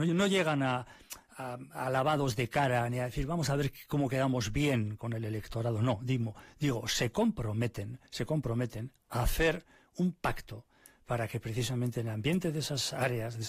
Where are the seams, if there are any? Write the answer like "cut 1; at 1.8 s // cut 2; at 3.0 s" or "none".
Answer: cut 1; at 8.1 s